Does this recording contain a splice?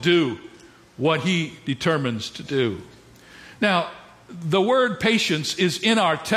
no; 0 cuts

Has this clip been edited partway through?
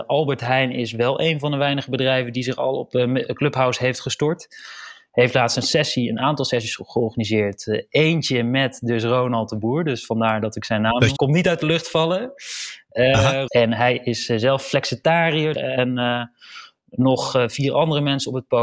yes; 3 cuts; at 11.2 s, 13.5 s, 15.5 s

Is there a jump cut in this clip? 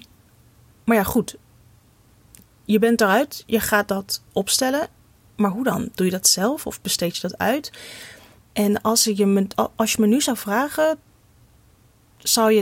no; 0 cuts

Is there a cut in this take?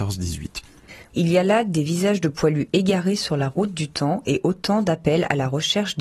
yes; 1 cut; at 1.1 s

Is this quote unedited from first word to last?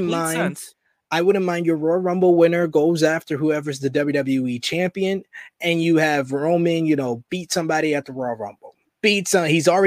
yes; 0 cuts

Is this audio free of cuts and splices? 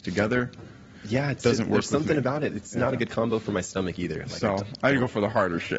yes; 0 cuts

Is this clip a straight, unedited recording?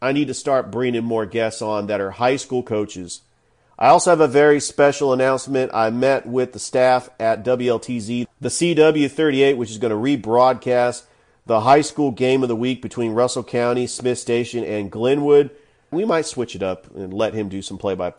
no; 1 cut; at 15.9 s

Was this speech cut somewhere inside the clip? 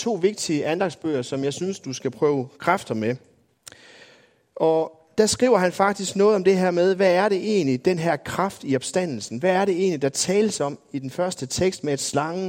no; 0 cuts

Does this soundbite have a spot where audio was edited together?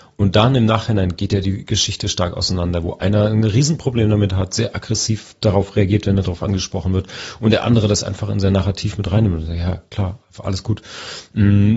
no; 0 cuts

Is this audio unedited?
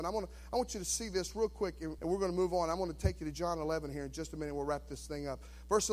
no; 1 cut; at 2.0 s

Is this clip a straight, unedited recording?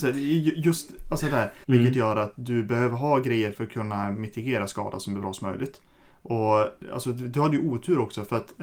no; 1 cut; at 1.6 s

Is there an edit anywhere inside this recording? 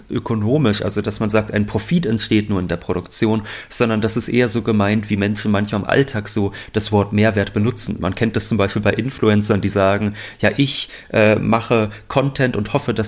no; 0 cuts

